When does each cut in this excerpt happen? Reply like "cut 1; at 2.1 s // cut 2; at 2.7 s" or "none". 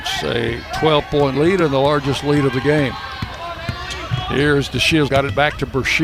cut 1; at 5.1 s